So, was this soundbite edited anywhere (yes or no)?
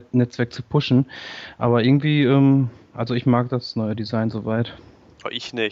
no